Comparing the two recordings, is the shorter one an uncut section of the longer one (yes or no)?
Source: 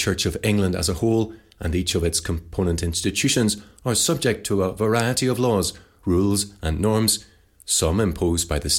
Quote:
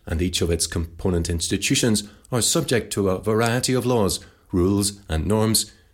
yes